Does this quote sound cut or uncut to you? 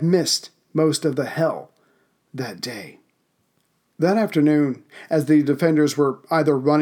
uncut